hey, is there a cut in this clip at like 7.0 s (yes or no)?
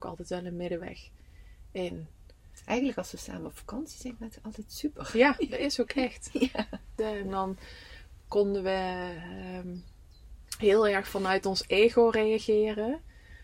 yes